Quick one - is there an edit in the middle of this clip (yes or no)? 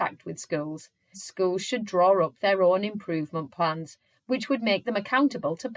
yes